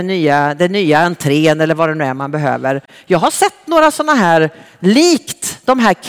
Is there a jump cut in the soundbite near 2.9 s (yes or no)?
no